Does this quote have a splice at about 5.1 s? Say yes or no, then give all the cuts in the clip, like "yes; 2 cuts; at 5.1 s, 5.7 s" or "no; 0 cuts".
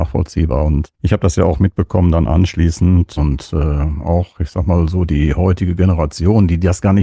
no; 1 cut; at 3.2 s